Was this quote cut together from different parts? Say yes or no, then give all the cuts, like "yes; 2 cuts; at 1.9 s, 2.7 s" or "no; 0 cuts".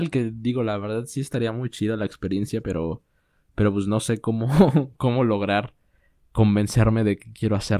no; 0 cuts